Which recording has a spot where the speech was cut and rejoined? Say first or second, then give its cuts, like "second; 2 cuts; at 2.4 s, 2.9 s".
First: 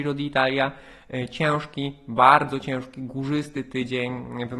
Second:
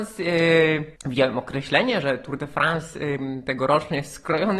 second; 1 cut; at 1.0 s